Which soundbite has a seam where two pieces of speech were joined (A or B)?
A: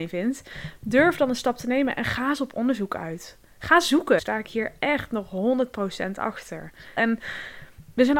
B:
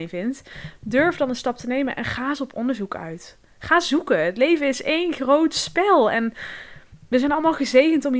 A